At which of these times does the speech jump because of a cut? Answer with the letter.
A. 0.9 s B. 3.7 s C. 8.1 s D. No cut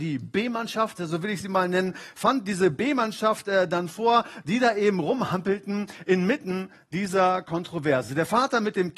D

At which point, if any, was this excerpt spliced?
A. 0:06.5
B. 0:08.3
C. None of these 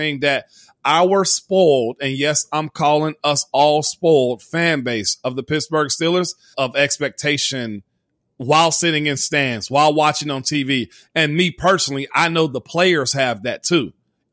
A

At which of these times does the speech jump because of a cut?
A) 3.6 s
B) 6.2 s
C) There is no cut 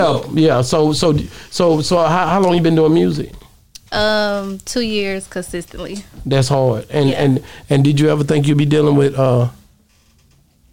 C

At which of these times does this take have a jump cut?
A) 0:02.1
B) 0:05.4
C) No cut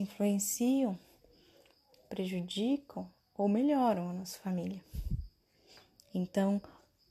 C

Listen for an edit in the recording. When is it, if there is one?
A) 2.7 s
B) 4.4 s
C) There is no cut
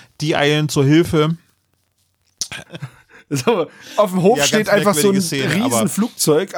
A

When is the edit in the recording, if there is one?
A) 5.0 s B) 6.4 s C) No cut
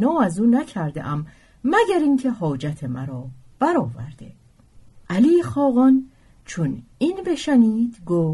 A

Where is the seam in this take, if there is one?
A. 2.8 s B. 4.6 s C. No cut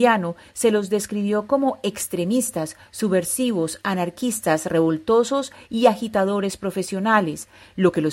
C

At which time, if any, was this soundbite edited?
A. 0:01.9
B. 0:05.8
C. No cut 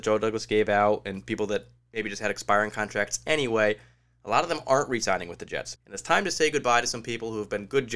B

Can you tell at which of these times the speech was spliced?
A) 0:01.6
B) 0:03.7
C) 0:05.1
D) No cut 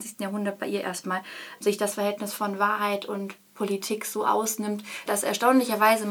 C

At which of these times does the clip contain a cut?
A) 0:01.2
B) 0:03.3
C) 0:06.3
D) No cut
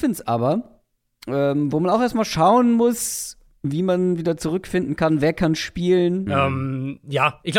C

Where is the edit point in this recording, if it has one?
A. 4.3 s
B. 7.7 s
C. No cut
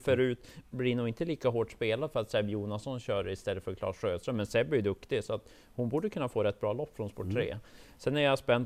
C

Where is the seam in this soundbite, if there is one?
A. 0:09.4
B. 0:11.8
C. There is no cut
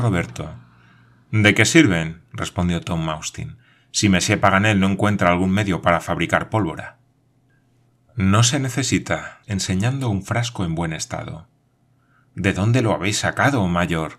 A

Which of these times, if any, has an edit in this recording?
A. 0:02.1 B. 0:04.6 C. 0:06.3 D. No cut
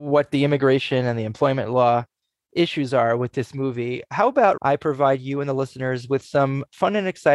B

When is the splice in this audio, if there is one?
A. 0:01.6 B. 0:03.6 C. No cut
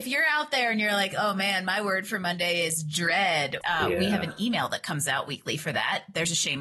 B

